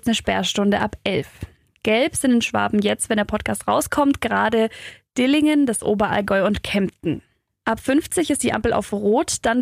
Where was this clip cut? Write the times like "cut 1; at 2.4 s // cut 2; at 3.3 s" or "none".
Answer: none